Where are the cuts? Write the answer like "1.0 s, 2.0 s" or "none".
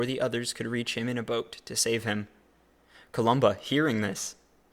none